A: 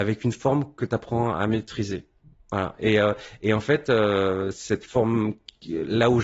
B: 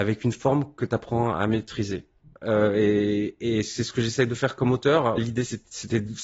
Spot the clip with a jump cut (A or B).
B